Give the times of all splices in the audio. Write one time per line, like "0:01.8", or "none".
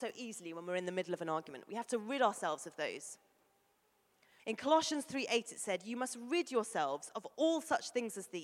0:04.4